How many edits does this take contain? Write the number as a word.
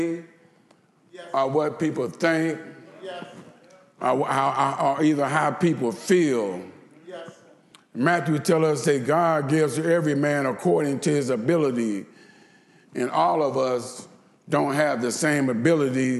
zero